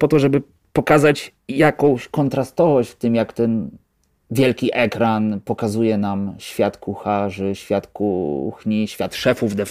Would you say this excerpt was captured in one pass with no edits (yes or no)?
yes